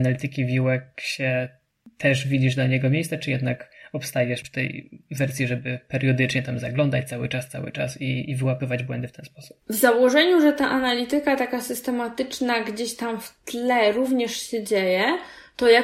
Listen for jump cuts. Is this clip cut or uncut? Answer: uncut